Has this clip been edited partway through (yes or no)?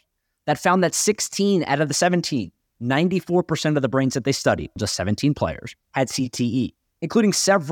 yes